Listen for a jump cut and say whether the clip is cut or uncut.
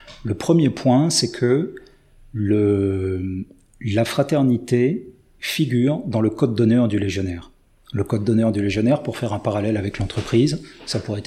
uncut